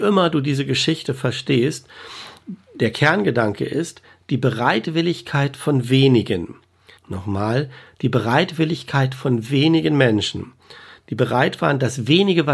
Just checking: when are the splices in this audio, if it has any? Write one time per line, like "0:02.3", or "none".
0:07.0